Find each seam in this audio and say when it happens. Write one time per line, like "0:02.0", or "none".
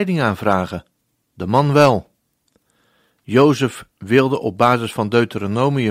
none